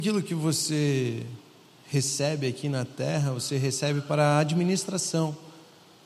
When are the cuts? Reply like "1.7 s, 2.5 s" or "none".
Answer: none